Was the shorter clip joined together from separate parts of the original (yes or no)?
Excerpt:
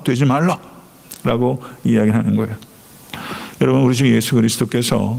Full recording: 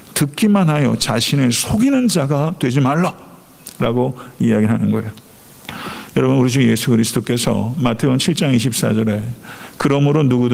no